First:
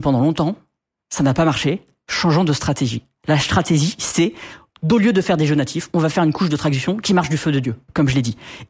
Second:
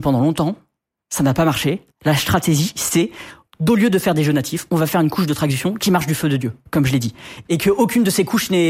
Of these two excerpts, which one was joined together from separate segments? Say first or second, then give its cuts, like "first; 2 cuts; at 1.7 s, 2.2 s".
second; 2 cuts; at 1.9 s, 7.4 s